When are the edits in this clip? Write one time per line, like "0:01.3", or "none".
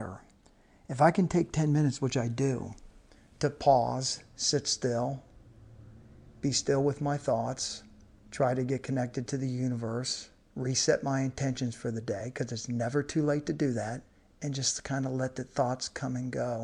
none